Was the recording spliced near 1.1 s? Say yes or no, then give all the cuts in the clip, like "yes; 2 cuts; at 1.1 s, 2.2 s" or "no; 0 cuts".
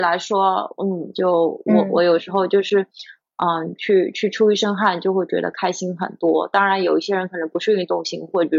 yes; 1 cut; at 1.1 s